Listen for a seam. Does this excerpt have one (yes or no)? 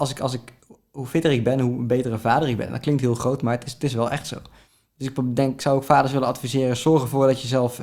no